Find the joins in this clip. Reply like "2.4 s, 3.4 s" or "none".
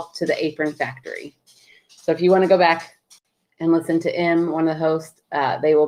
none